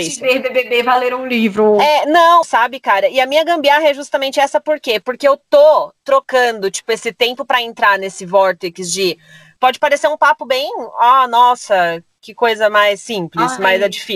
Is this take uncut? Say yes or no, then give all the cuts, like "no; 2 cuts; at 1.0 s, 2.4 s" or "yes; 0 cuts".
no; 2 cuts; at 2.4 s, 9.6 s